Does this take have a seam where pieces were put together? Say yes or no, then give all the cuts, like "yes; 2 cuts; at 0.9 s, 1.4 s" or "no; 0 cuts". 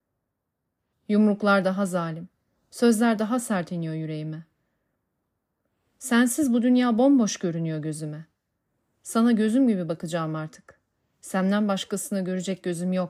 yes; 1 cut; at 0.9 s